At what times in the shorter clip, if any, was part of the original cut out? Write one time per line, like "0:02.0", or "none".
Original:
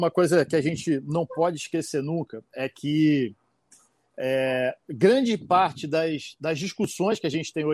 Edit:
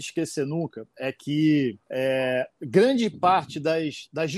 0:01.8